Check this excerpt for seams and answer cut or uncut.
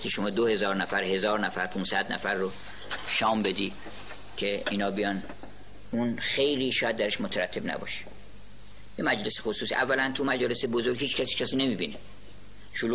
uncut